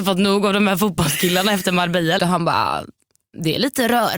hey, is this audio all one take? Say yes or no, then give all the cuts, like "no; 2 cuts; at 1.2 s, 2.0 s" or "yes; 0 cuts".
no; 1 cut; at 2.2 s